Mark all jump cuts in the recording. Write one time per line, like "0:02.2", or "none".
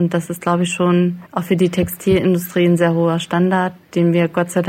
0:01.3
0:02.8